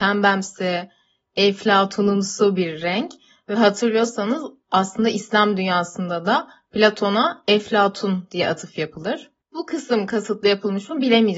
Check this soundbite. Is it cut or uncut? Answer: uncut